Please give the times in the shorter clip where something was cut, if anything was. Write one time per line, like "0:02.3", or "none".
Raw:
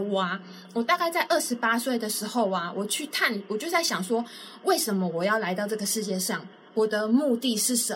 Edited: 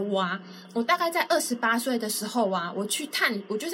none